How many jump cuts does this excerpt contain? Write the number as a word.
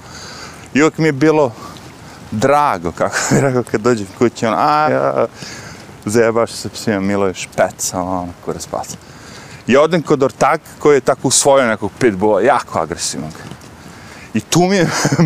one